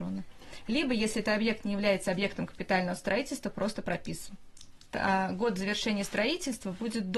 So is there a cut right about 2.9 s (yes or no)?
no